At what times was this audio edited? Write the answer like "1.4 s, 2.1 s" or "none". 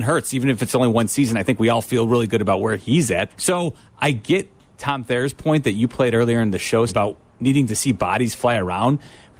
3.3 s, 6.9 s